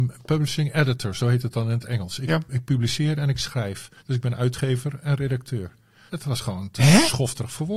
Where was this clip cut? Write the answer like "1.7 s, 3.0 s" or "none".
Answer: 4.0 s, 6.1 s